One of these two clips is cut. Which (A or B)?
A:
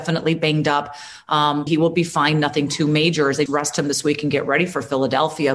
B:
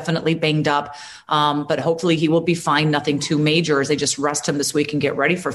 A